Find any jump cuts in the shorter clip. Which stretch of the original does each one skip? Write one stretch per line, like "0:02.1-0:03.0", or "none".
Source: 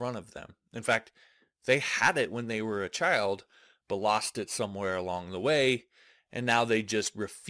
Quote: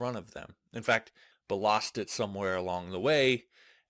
0:01.3-0:03.7